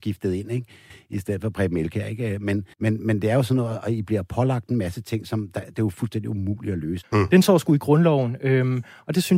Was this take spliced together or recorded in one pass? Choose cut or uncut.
cut